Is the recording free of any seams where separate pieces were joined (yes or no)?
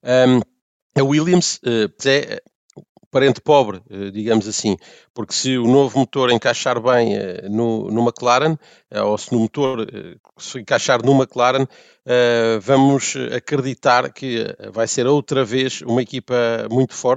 no